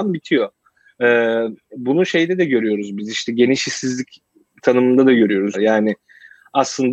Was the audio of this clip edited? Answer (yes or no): yes